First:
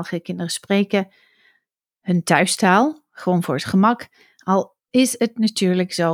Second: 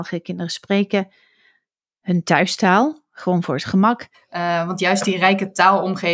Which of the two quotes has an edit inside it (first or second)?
second